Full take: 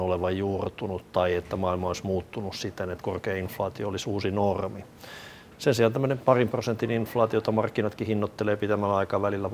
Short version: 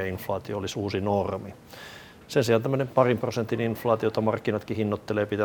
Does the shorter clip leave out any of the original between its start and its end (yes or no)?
no